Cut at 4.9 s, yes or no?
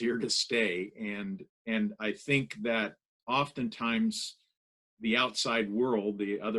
no